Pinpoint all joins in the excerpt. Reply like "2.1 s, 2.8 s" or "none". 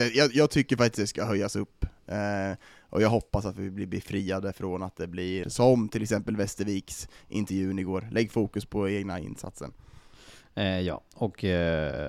5.4 s